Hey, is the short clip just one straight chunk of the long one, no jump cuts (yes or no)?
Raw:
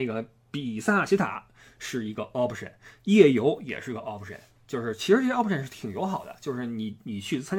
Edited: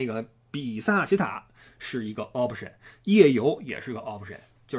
yes